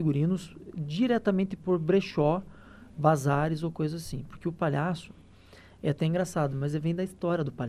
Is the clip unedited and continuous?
yes; 0 cuts

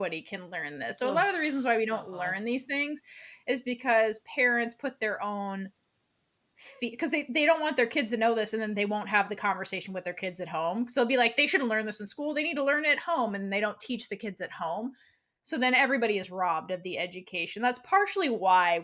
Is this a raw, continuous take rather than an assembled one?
yes; 0 cuts

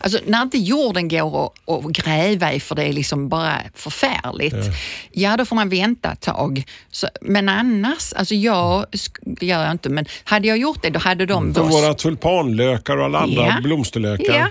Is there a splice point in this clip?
yes; 2 cuts; at 9.4 s, 11.5 s

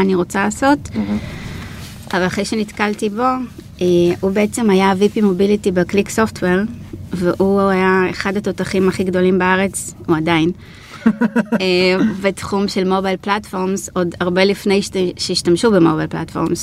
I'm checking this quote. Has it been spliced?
no; 0 cuts

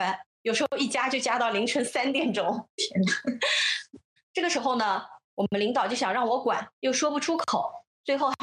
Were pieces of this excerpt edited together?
yes; 2 cuts; at 4.2 s, 5.2 s

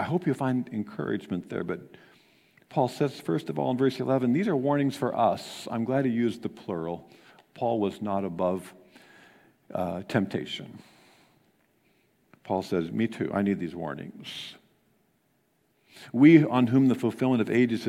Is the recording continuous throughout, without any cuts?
yes; 0 cuts

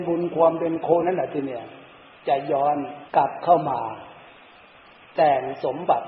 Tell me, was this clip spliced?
yes; 2 cuts; at 1.0 s, 3.1 s

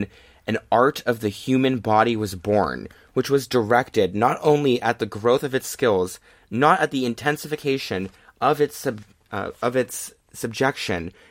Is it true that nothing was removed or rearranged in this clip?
yes; 0 cuts

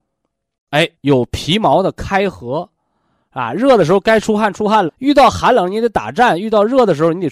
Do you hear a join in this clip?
yes; 2 cuts; at 0.9 s, 4.9 s

